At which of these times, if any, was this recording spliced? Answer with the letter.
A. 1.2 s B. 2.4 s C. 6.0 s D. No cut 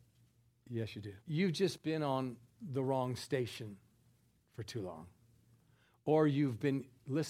A